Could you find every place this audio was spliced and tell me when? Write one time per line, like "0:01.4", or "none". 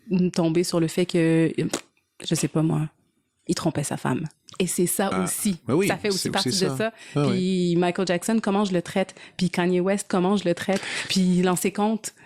0:11.1